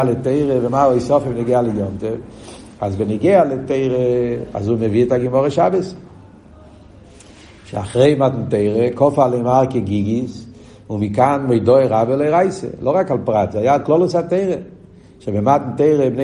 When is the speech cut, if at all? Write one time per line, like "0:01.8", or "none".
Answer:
none